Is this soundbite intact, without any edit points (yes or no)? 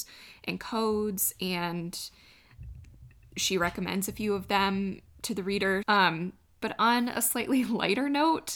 no